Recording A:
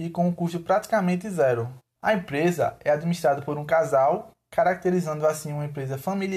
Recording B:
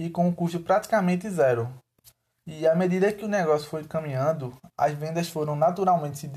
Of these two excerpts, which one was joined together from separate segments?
A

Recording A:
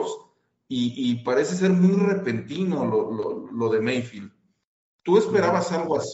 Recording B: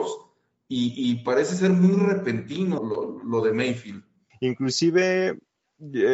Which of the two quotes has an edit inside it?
B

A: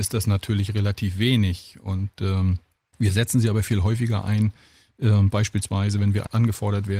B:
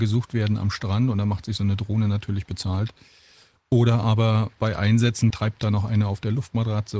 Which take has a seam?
B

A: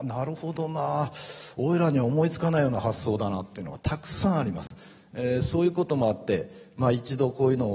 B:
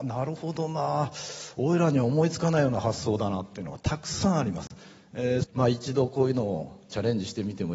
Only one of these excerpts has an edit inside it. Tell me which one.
B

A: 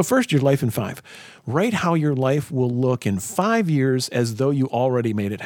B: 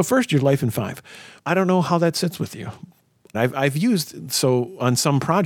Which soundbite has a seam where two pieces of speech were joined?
B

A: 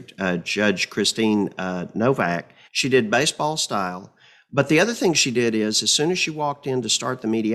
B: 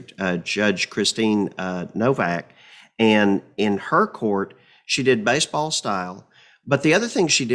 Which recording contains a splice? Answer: A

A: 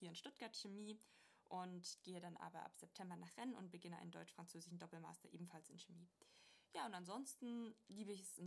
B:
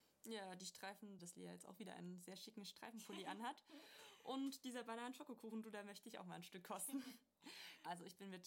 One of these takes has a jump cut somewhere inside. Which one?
B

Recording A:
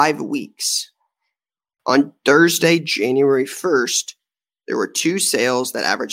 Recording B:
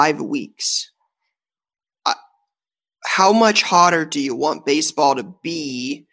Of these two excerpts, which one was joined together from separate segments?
A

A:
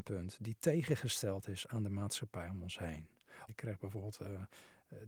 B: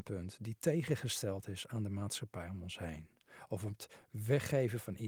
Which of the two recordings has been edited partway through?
A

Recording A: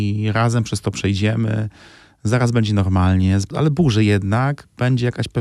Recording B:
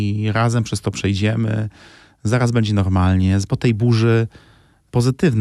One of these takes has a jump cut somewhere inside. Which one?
A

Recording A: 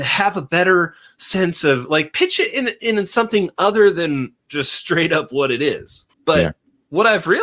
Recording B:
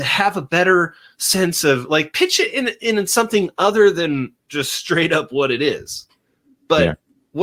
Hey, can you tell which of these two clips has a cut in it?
A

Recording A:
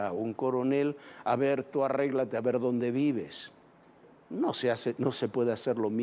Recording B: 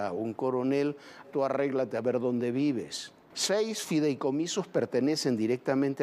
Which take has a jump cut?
B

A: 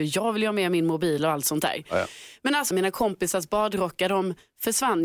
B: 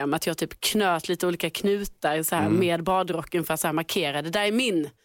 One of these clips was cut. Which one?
A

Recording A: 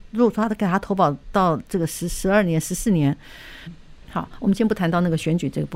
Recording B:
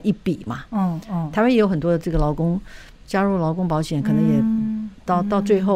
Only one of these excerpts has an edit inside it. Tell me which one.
A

